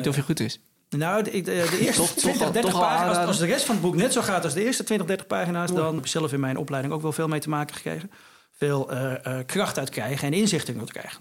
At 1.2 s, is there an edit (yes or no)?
no